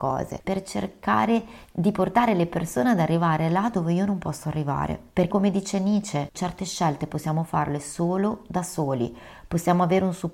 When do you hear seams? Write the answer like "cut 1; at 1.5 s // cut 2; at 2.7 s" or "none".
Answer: cut 1; at 5.3 s // cut 2; at 6.3 s